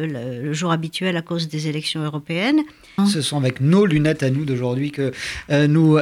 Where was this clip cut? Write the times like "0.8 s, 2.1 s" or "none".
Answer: 3.0 s